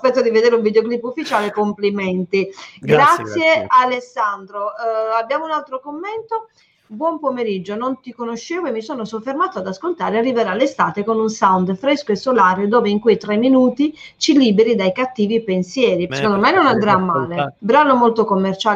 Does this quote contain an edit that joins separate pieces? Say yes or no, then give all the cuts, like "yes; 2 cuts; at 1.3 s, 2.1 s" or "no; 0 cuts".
yes; 2 cuts; at 16.1 s, 17.6 s